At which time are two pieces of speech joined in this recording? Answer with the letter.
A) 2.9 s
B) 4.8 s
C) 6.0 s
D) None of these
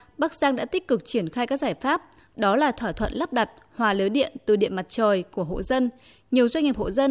D